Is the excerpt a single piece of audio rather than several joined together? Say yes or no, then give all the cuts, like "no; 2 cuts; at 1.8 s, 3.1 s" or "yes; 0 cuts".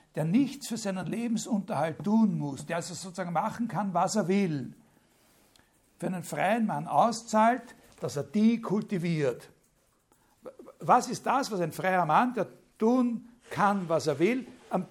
yes; 0 cuts